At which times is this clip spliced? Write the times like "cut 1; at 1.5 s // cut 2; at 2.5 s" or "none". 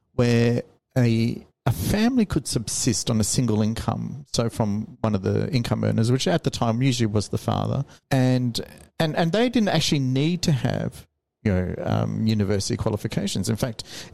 none